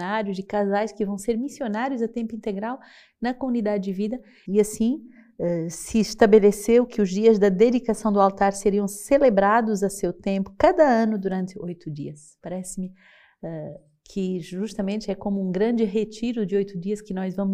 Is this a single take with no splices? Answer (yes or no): no